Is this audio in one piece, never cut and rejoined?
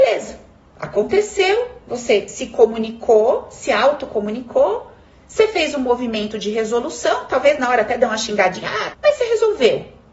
no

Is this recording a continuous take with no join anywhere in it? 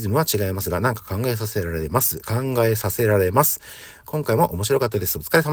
no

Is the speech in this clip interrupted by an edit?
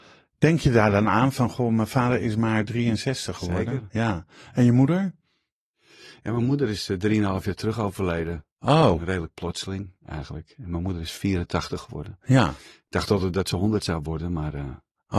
no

